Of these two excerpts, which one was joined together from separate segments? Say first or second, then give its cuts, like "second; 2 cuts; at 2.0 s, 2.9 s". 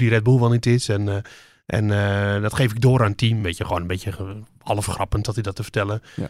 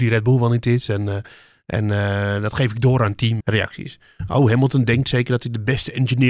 second; 1 cut; at 3.4 s